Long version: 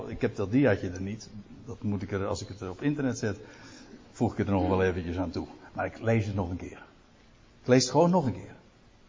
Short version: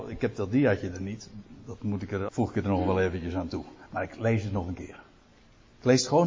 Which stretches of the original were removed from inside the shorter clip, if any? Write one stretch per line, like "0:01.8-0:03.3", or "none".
0:02.3-0:04.1